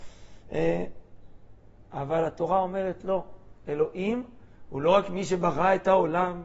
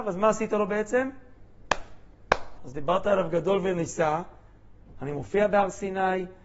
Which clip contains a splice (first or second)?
second